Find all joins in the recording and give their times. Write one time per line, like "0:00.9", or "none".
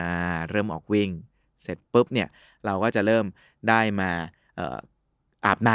none